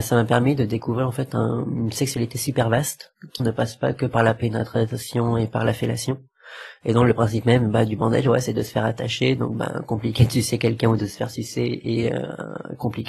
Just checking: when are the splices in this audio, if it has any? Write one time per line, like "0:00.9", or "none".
0:03.4